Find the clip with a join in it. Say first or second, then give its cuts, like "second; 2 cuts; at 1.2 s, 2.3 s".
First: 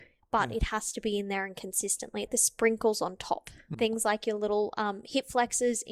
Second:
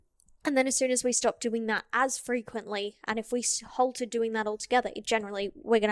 first; 2 cuts; at 2.3 s, 3.7 s